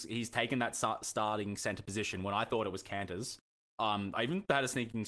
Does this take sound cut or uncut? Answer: uncut